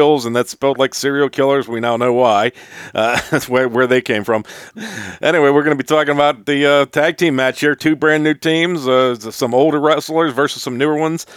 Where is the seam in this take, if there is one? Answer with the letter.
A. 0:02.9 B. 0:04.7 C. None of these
B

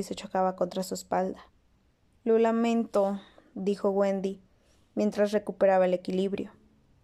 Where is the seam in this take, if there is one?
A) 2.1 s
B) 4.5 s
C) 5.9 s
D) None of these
A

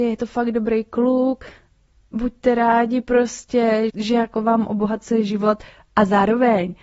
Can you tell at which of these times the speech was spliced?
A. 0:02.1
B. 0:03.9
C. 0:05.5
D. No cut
B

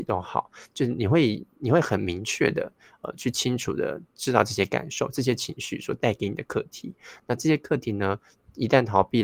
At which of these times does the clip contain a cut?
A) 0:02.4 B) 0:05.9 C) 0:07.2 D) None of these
D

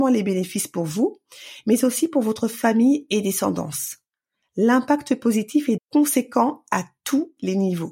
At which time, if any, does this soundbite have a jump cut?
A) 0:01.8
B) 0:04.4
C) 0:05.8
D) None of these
C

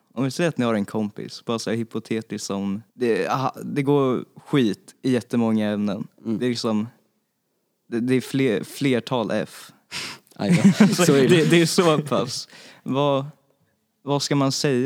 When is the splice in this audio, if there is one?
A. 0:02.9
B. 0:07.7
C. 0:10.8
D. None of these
A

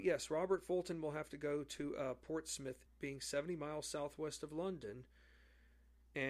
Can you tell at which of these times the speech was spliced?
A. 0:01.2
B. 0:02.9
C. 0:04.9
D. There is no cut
B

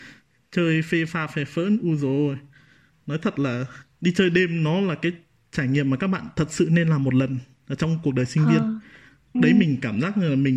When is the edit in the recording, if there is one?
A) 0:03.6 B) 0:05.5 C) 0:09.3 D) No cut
C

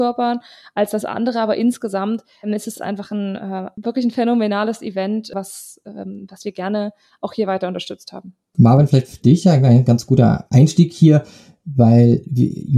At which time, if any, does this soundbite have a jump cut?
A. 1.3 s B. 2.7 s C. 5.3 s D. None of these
D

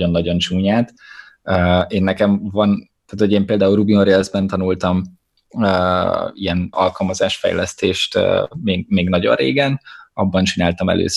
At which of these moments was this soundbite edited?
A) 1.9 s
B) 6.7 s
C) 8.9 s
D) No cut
B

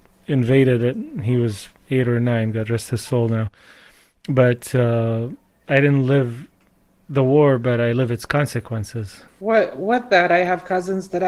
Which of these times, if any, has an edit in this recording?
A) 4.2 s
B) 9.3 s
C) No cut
B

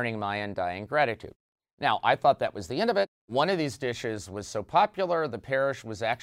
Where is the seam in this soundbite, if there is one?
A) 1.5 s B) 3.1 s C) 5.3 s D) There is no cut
B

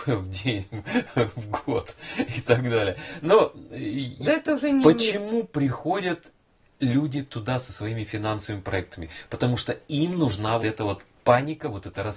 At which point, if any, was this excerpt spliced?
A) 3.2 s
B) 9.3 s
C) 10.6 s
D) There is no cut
C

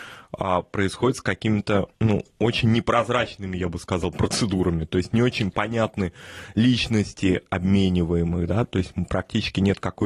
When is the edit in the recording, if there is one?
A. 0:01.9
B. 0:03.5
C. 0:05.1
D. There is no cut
A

